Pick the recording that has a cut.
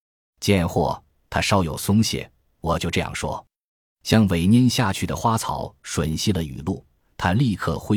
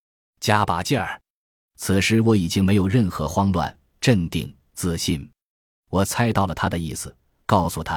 second; 1 cut; at 5.8 s

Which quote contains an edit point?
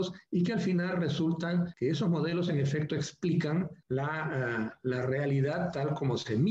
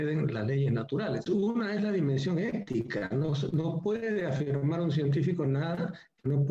second; 1 cut; at 1.3 s

